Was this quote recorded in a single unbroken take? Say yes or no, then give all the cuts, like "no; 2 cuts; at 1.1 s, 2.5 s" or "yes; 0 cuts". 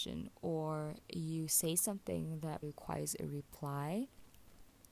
no; 1 cut; at 2.6 s